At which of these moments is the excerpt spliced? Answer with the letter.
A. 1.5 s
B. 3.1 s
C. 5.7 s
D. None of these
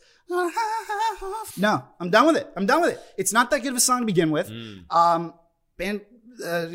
A